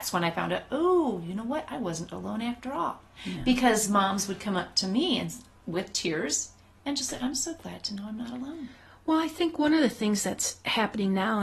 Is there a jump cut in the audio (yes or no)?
no